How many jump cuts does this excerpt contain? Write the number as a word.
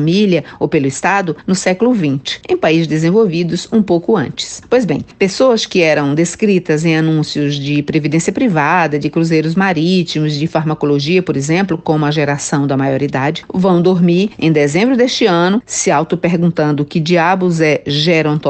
zero